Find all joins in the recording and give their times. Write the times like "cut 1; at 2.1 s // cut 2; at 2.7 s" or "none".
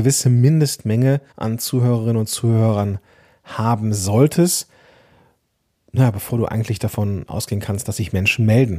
cut 1; at 1.3 s